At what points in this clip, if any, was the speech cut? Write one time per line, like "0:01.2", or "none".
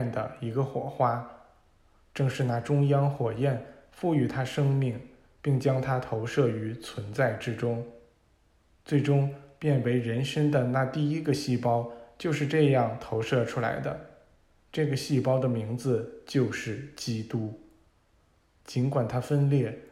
0:14.6